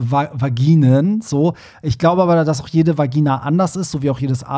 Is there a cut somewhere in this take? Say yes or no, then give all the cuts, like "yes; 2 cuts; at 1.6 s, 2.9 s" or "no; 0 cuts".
no; 0 cuts